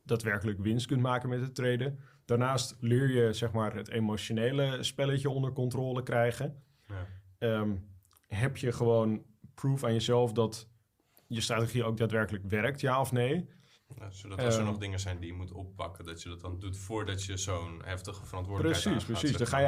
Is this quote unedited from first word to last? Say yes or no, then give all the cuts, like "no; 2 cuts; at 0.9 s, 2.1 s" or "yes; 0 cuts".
no; 1 cut; at 13.8 s